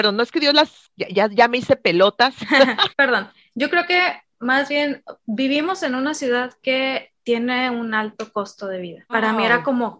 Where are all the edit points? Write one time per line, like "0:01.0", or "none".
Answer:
0:02.9
0:09.1

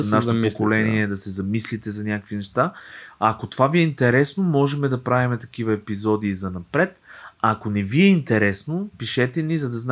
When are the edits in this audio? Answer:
none

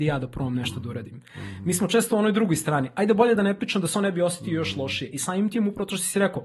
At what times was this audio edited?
none

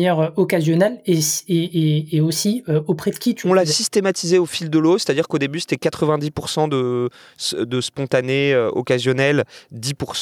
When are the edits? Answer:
none

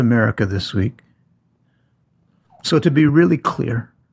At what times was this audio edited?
none

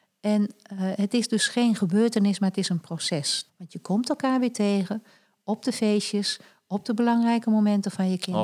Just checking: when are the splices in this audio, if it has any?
0:03.5

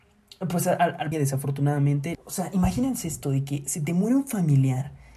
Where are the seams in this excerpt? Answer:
0:01.1
0:02.1

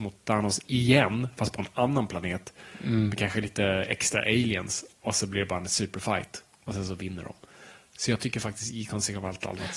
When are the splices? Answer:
none

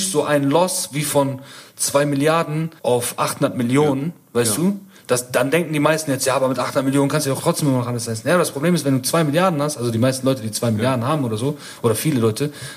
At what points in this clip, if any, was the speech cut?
0:02.8

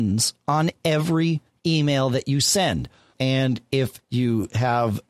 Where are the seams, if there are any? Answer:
0:03.1

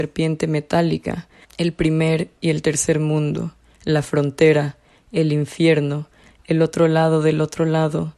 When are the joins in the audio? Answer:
0:01.4
0:06.3

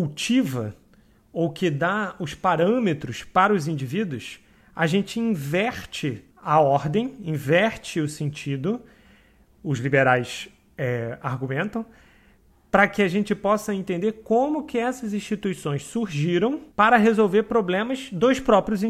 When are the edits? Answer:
0:06.3
0:16.7

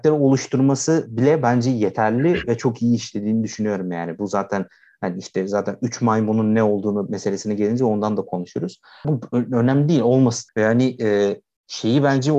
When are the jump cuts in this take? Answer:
0:09.0
0:10.5

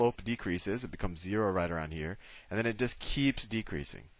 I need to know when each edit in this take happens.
none

